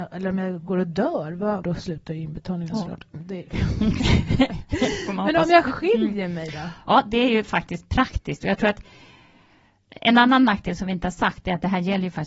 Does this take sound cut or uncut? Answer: cut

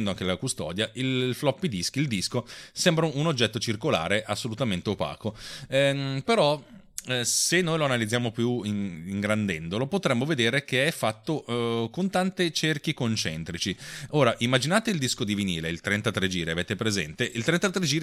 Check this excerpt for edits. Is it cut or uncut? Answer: uncut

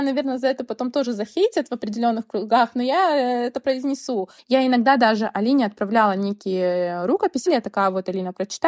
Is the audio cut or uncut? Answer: cut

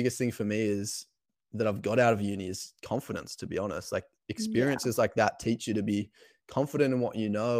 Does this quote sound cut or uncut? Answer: uncut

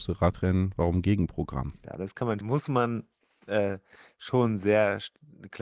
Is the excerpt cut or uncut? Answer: cut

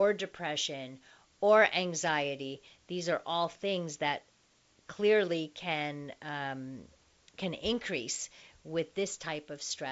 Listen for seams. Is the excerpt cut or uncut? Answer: uncut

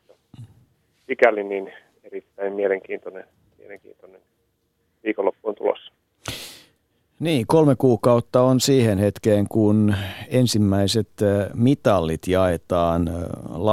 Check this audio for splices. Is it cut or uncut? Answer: uncut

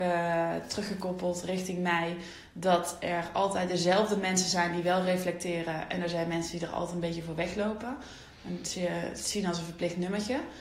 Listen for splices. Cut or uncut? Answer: uncut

